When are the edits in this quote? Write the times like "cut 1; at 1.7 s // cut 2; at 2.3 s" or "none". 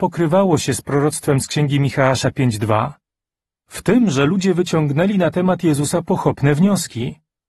cut 1; at 3.6 s